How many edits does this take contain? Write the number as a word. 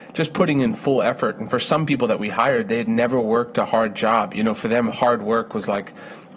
zero